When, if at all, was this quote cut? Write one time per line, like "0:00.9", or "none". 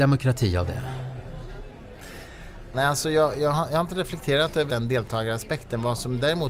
0:02.7
0:04.7